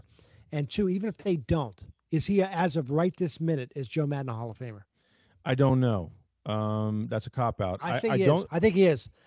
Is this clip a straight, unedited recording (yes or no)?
yes